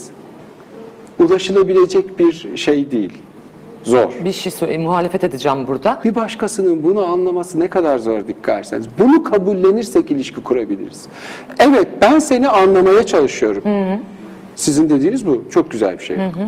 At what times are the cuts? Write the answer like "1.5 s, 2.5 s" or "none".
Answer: 6.0 s